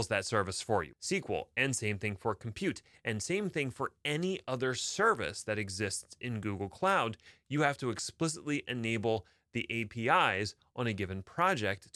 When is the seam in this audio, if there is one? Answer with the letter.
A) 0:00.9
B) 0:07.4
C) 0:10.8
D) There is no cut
A